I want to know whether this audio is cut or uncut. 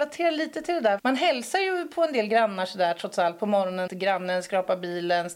cut